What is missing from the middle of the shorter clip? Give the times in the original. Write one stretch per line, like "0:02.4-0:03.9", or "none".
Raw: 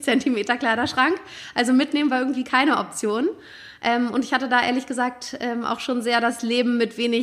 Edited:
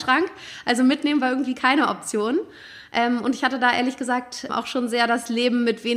0:05.4-0:05.6

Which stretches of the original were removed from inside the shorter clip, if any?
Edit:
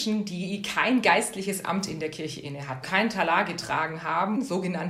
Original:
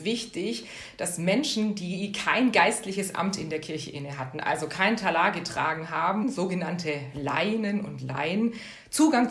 0:04.3-0:04.7

